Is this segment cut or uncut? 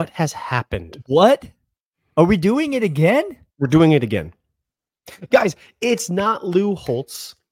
uncut